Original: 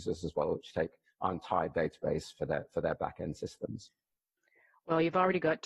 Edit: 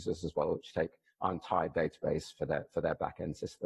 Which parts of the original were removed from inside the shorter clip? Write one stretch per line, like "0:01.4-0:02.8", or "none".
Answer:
none